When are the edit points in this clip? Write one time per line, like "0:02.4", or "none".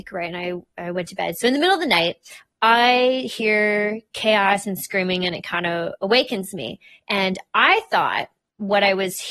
none